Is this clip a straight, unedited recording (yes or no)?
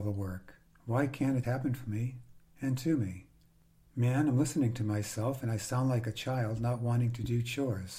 no